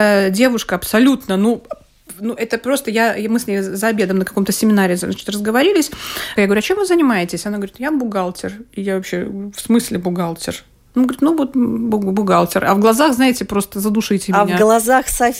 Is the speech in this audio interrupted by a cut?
yes; 1 cut; at 6.4 s

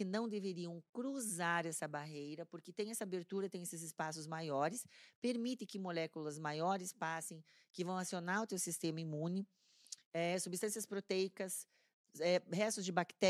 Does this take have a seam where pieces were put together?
no; 0 cuts

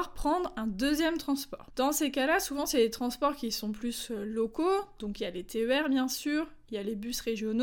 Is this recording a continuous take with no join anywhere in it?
yes; 0 cuts

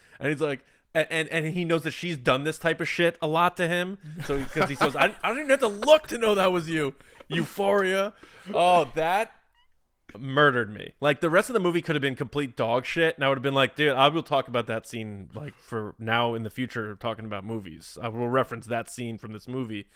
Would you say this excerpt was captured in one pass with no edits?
yes; 0 cuts

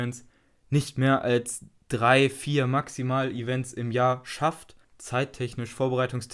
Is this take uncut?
yes; 0 cuts

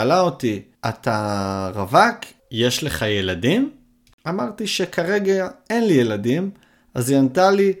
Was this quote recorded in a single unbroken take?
yes; 0 cuts

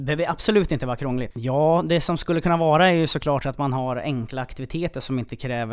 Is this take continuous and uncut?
no; 1 cut; at 1.3 s

